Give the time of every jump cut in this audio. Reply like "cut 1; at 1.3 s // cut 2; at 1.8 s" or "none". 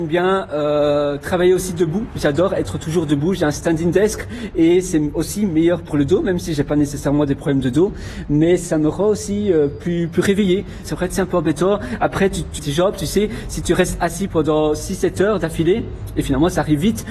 cut 1; at 10.8 s // cut 2; at 12.6 s